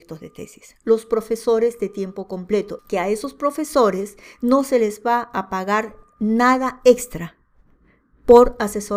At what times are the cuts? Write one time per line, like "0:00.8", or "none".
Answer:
0:02.8

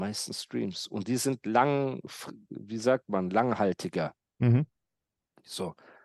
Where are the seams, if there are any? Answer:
none

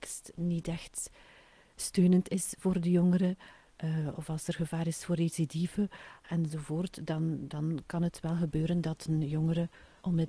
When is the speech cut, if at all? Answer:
none

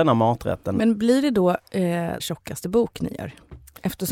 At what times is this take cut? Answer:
0:02.2

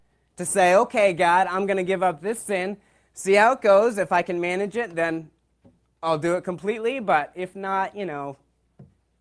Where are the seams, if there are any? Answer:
none

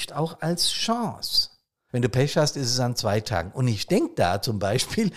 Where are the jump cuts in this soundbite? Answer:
0:01.9

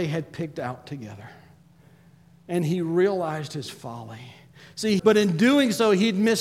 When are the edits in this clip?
0:05.0

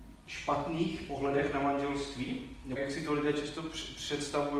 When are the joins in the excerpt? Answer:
0:02.8

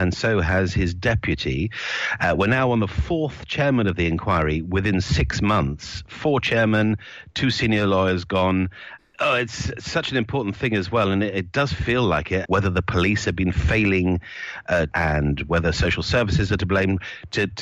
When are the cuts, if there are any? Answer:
0:09.0
0:12.5
0:14.9

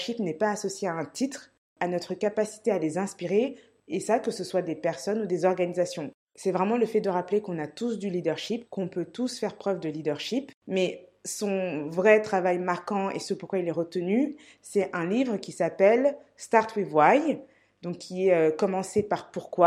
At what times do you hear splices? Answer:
0:01.8
0:10.6

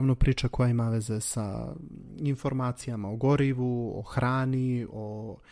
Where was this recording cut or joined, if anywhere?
none

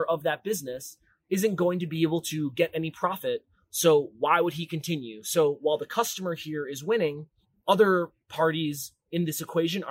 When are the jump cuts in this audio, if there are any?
none

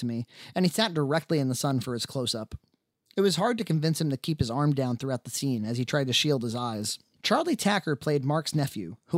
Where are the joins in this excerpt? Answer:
0:07.2

